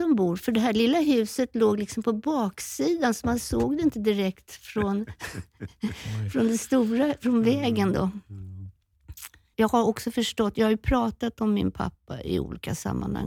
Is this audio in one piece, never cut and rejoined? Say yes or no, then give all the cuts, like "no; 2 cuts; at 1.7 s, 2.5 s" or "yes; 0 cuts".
no; 1 cut; at 9.5 s